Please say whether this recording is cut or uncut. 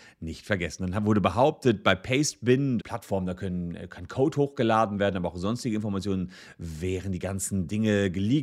cut